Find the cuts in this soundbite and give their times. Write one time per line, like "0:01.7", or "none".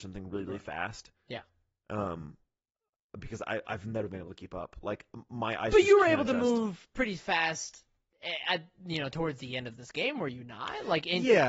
none

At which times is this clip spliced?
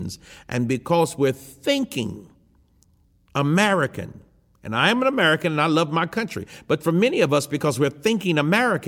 none

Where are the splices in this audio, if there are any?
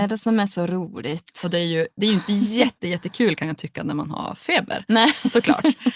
none

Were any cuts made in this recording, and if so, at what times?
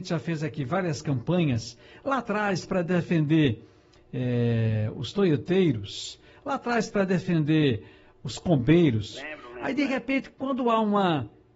0:09.1

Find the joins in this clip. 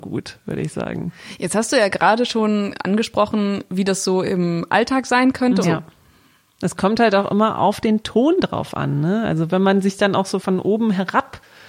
0:05.6

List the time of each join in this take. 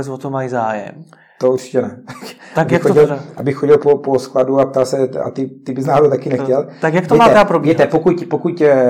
none

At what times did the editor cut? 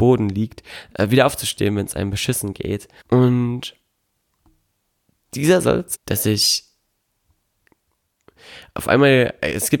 0:03.0
0:05.9

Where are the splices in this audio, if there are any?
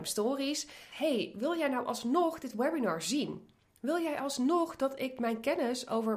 0:00.9

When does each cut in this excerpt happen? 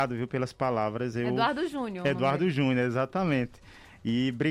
none

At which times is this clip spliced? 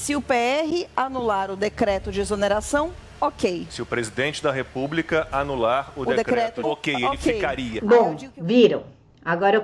0:06.6
0:07.8

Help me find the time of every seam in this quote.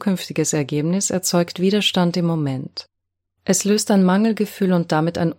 none

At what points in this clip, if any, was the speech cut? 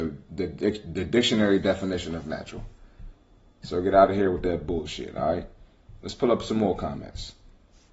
none

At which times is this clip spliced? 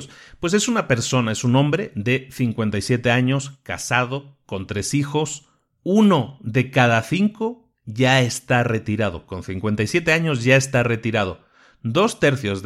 none

